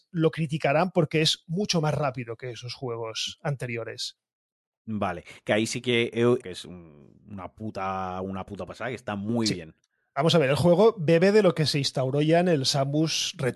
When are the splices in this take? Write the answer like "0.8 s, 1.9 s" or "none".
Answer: 5.4 s, 6.4 s